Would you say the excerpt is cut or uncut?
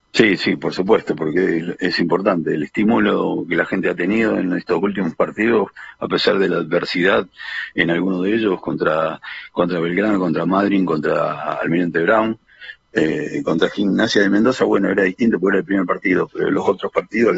uncut